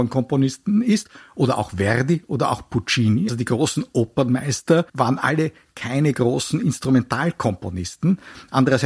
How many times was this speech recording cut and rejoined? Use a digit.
2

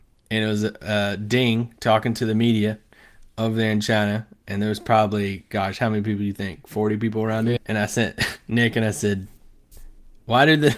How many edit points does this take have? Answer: 1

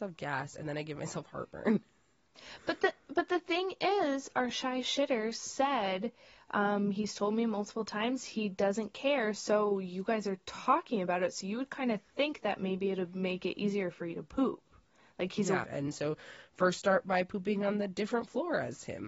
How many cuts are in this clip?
1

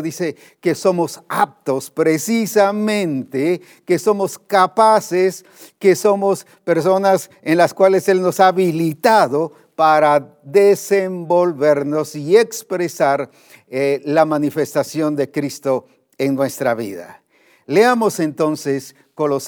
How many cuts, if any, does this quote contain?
0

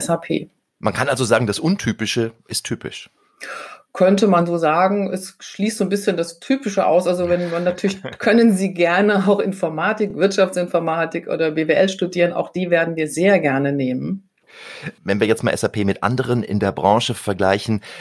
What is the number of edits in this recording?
0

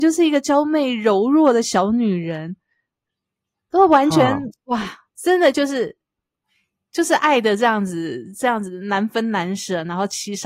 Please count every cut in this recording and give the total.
1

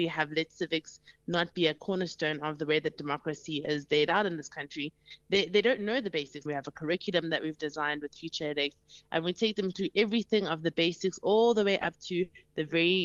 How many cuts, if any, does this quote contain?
1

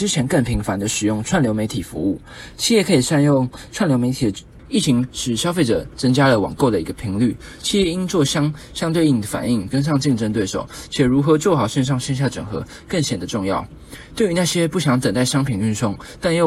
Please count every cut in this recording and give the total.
2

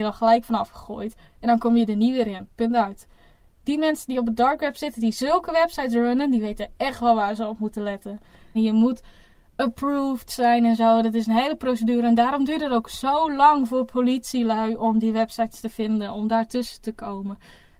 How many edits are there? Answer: 1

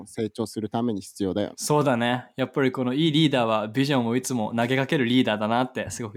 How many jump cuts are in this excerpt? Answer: 1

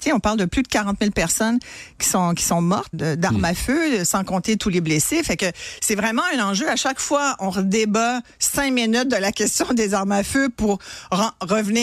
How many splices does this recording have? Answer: 1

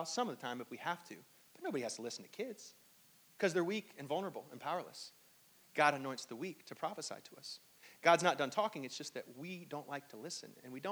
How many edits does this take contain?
1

